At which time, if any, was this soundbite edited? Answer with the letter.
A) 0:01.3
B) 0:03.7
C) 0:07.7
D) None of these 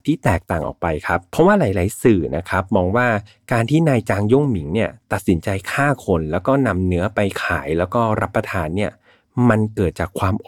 A